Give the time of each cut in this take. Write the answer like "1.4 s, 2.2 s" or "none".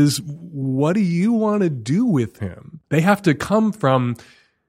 2.9 s